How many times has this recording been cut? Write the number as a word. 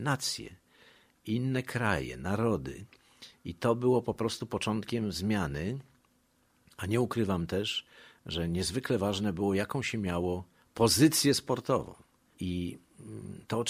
one